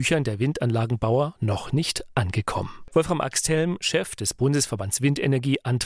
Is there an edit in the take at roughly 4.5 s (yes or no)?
no